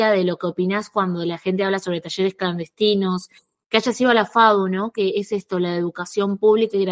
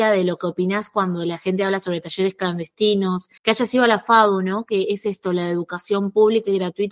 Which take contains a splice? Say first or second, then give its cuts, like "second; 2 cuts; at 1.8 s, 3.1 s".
second; 1 cut; at 3.4 s